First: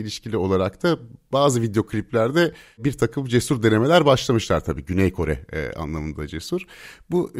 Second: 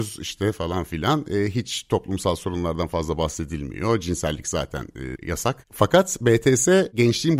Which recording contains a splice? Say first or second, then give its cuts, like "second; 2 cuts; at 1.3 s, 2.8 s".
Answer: second; 1 cut; at 5.2 s